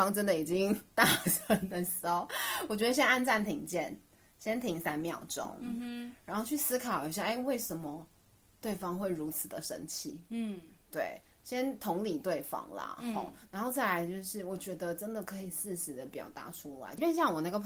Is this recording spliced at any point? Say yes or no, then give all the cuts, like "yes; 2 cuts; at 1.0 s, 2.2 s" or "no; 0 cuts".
no; 0 cuts